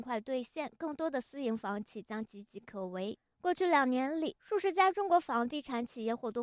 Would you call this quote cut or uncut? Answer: uncut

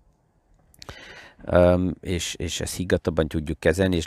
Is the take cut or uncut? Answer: uncut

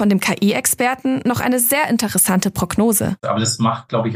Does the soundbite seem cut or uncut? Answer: cut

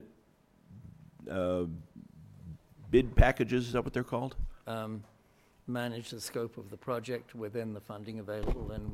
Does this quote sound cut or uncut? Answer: cut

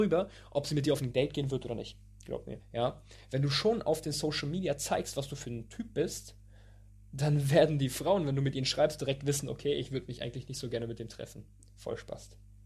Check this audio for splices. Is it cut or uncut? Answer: cut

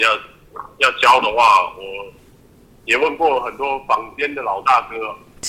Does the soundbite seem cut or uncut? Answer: uncut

